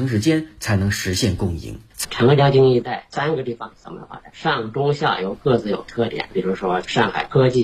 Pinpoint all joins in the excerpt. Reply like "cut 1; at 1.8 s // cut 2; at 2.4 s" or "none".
cut 1; at 2.0 s // cut 2; at 4.3 s